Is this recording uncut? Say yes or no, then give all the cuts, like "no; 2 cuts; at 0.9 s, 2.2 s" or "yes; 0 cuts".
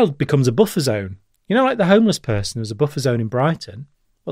yes; 0 cuts